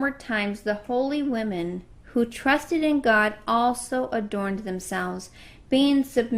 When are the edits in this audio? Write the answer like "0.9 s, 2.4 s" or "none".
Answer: none